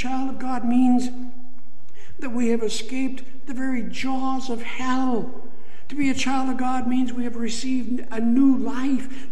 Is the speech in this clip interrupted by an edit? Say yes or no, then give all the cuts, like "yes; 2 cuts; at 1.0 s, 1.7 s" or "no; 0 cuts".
no; 0 cuts